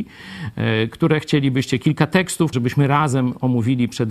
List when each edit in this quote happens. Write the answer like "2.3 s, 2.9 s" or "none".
2.5 s